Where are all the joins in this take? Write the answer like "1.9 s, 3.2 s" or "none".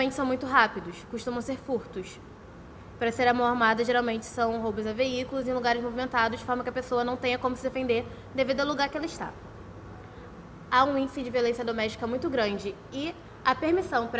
10.7 s